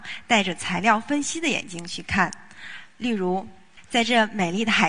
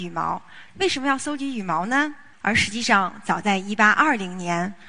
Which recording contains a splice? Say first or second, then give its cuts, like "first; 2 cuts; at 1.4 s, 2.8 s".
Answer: second; 1 cut; at 2.3 s